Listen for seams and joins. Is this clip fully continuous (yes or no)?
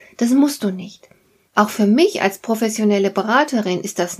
no